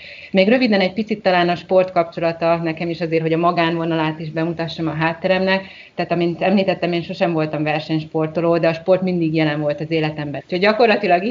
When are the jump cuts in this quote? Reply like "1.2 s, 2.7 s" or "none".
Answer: 10.4 s